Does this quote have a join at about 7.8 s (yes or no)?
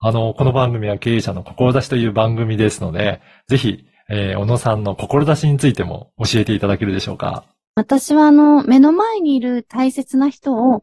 yes